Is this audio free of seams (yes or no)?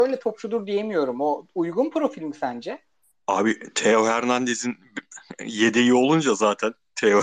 yes